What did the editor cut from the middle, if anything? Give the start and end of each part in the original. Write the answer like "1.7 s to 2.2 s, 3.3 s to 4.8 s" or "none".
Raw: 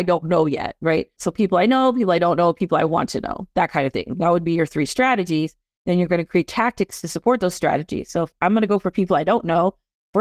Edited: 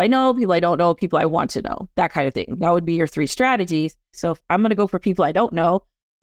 5.7 s to 8.1 s